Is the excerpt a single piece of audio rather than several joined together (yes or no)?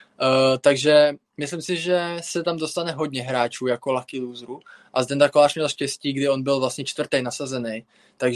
yes